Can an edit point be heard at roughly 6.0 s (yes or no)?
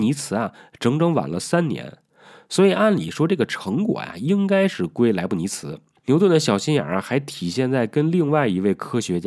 yes